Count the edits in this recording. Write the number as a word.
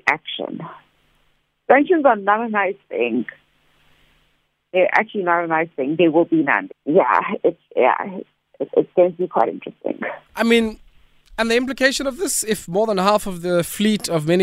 two